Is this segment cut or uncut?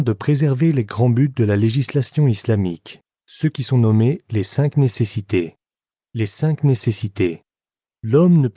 uncut